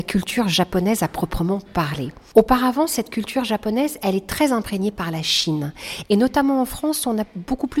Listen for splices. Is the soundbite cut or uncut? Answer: cut